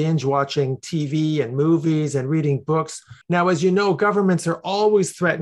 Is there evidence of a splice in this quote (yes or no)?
yes